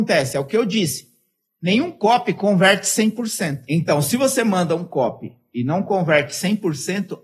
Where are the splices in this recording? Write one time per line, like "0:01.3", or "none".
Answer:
none